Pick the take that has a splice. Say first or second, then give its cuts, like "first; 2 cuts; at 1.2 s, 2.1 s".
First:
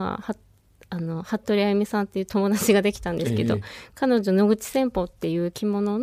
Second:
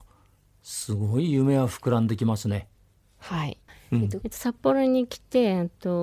second; 1 cut; at 4.2 s